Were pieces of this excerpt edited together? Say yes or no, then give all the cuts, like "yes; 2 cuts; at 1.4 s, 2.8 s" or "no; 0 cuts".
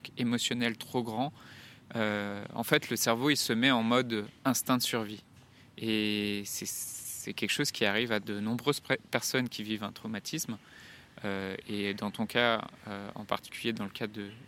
no; 0 cuts